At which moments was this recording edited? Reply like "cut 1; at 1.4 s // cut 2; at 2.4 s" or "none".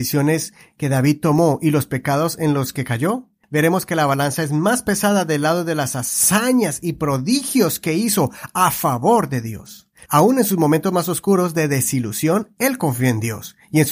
cut 1; at 3.4 s // cut 2; at 10.1 s